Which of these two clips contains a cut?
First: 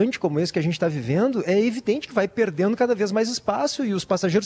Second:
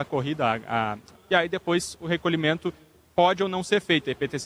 second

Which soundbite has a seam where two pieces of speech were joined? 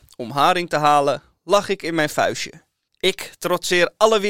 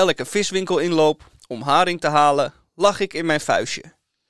first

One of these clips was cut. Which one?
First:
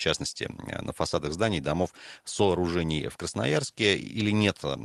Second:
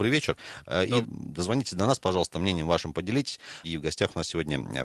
second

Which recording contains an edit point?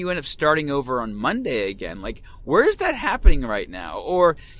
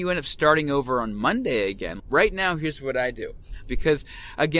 second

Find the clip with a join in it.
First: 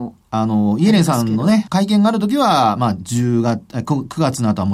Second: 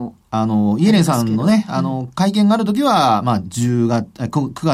first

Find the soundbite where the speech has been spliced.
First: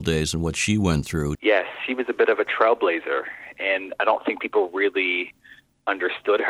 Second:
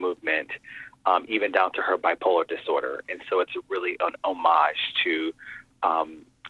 first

